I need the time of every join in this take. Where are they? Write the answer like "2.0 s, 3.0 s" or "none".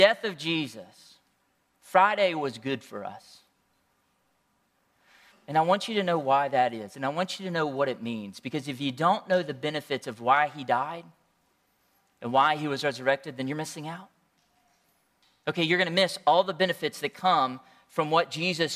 5.3 s